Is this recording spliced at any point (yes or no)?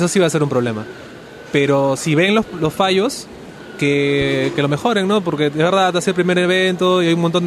no